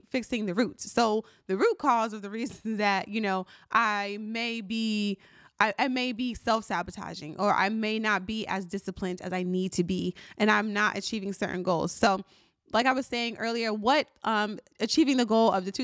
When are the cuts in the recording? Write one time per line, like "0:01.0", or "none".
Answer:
none